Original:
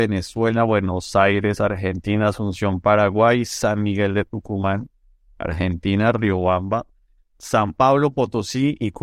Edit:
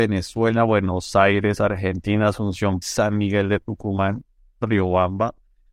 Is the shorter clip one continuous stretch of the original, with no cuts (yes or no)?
no